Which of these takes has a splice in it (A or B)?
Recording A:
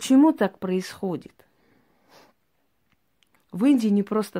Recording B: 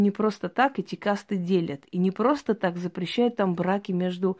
A